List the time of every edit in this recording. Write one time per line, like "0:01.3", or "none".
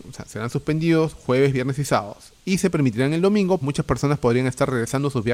0:03.6